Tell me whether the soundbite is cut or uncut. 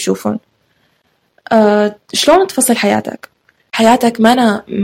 uncut